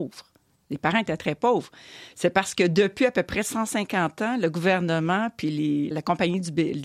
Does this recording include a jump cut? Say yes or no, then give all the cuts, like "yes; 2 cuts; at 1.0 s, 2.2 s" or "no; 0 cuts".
yes; 2 cuts; at 2.1 s, 5.9 s